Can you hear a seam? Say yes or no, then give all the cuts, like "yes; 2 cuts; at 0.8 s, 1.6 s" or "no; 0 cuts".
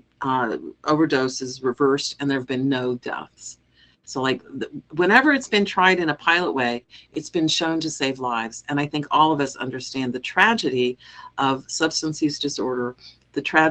no; 0 cuts